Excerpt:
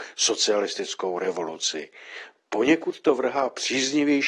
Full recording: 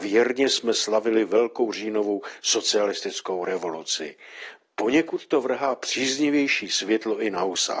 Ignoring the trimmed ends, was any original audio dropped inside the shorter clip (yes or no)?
no